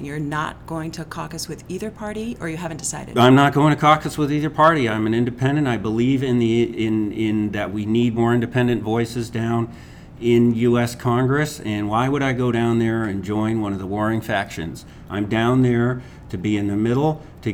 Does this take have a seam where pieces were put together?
no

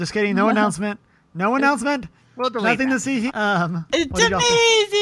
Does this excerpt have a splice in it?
yes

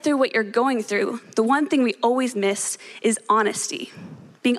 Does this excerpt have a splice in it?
no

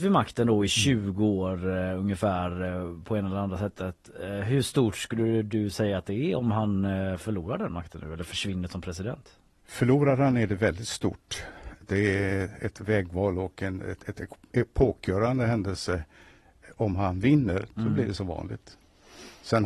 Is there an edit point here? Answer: no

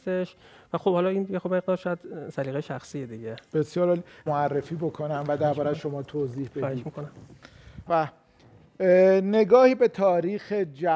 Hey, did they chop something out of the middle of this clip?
yes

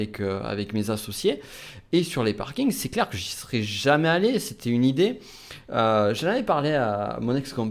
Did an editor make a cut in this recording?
no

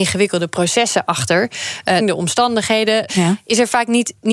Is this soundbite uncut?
no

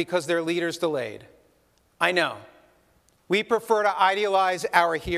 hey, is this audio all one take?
no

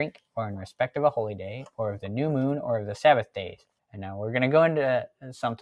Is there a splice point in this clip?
yes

